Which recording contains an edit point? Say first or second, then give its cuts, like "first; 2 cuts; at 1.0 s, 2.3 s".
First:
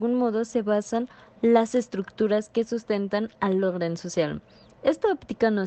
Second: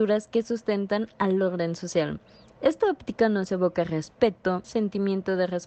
second; 1 cut; at 4.6 s